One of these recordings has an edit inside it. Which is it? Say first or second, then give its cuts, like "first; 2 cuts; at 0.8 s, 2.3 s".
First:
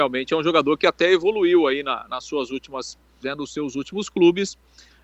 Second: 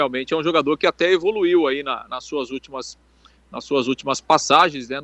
first; 1 cut; at 3.2 s